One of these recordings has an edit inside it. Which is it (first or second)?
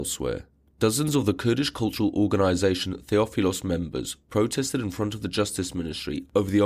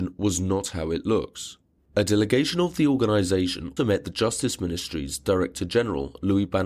second